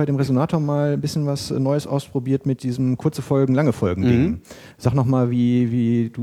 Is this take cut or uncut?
uncut